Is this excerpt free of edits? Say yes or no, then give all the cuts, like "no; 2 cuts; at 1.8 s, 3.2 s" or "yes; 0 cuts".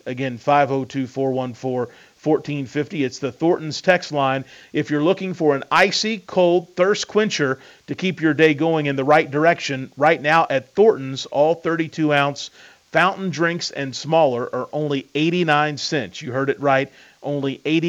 yes; 0 cuts